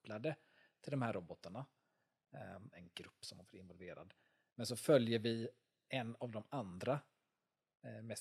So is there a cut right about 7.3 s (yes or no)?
no